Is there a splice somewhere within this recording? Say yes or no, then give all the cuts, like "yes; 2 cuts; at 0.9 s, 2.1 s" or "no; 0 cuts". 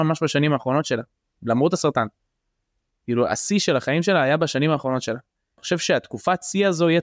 no; 0 cuts